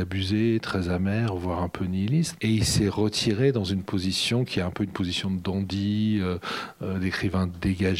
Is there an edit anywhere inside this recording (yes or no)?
yes